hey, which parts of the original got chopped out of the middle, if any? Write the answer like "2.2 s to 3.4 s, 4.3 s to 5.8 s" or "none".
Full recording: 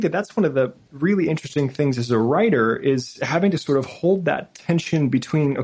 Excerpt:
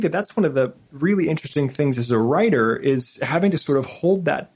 none